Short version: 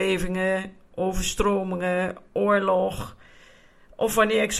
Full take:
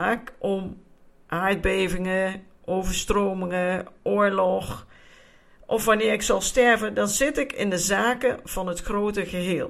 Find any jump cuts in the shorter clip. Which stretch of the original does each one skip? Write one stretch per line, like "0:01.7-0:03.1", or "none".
none